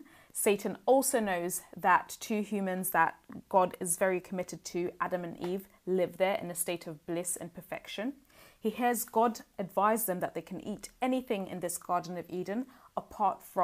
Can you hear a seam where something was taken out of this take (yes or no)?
no